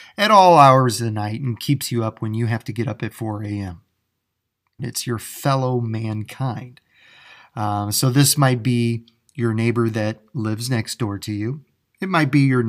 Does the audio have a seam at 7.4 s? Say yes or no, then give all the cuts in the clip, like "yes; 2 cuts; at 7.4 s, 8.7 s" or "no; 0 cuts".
no; 1 cut; at 4.8 s